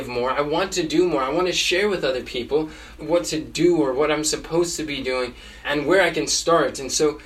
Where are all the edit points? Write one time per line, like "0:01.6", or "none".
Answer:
0:03.0
0:05.6